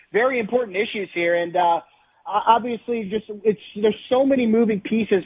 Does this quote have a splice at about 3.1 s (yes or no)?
no